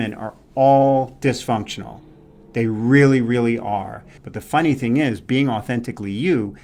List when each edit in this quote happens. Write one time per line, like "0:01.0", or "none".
0:04.2